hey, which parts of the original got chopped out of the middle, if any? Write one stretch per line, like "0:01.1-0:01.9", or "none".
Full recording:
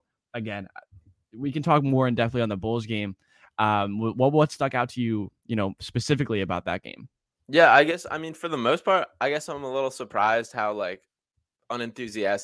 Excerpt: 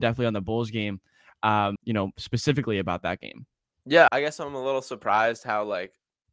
0:03.9-0:05.4
0:07.7-0:09.2